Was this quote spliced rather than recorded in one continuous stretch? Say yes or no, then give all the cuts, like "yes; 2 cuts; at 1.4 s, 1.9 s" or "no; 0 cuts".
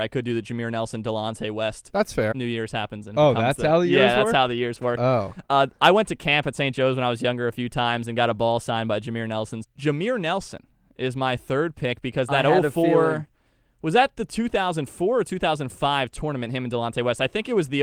yes; 2 cuts; at 2.3 s, 9.6 s